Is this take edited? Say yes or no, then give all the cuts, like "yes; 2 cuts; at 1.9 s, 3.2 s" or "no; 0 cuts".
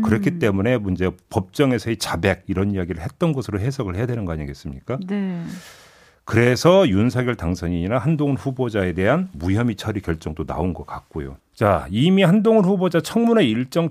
yes; 1 cut; at 11.4 s